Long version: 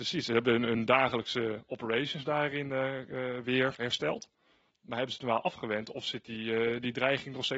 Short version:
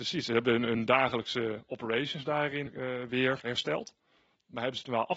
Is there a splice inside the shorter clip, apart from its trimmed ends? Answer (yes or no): yes